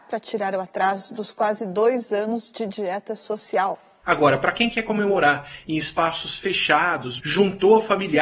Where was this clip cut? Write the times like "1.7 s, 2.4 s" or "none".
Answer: 4.0 s, 7.2 s